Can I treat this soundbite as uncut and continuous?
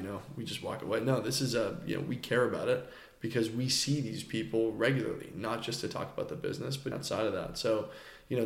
no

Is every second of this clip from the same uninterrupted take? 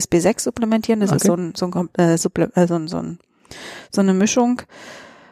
yes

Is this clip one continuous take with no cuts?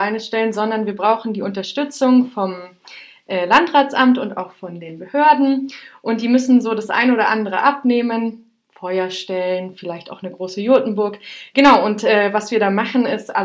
yes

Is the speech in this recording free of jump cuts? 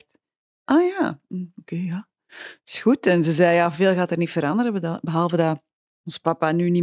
yes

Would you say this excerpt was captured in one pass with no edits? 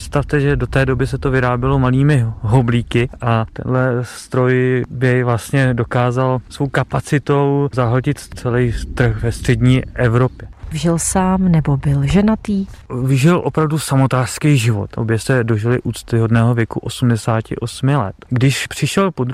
no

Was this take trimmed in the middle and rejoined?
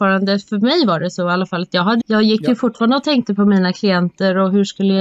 yes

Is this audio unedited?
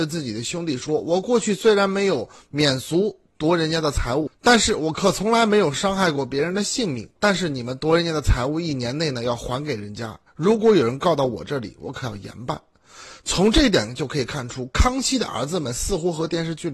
no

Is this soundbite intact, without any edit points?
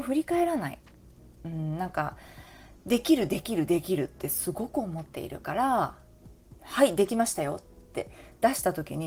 yes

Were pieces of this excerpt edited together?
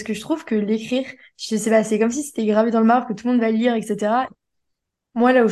yes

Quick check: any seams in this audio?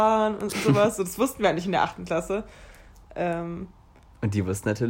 no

